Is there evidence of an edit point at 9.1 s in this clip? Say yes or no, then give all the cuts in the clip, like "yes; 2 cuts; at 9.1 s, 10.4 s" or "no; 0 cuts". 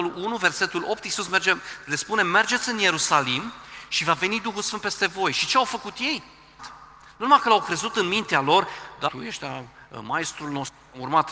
yes; 2 cuts; at 6.6 s, 9.1 s